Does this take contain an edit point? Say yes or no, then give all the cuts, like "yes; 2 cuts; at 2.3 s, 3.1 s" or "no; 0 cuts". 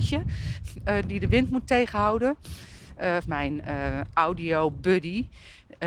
yes; 1 cut; at 3.2 s